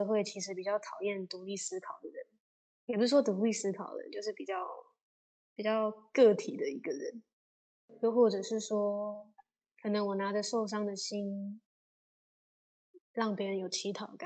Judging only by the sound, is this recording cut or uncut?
uncut